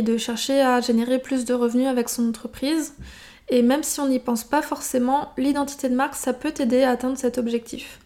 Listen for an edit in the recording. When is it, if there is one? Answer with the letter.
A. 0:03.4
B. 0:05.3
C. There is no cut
C